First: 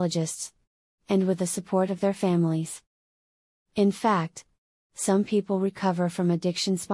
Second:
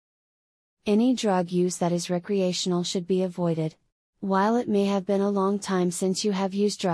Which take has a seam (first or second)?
second